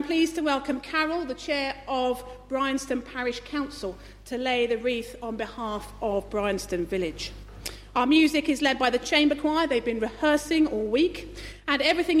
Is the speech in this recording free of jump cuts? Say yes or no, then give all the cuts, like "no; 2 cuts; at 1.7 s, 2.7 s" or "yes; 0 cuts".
yes; 0 cuts